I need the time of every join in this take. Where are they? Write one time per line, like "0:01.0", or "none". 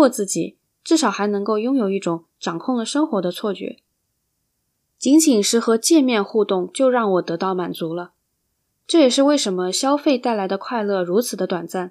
0:04.9